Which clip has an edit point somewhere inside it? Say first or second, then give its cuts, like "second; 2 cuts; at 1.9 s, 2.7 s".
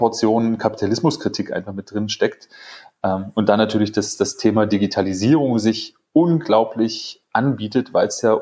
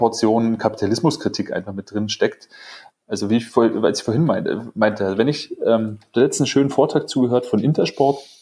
second; 1 cut; at 2.9 s